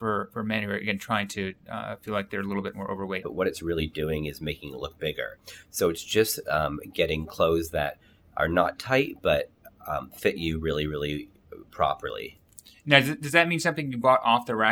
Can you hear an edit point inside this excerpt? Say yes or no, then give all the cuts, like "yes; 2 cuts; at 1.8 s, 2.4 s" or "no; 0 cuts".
yes; 1 cut; at 3.2 s